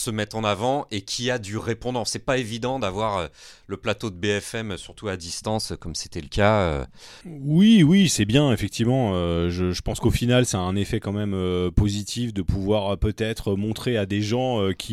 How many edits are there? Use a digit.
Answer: 1